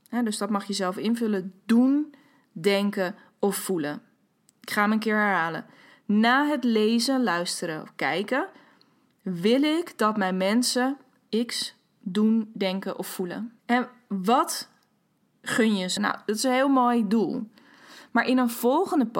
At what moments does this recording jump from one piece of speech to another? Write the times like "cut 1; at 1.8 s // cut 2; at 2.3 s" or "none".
cut 1; at 13.6 s // cut 2; at 16.0 s